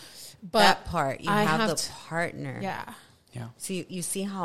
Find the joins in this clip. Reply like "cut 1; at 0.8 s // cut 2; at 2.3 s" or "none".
none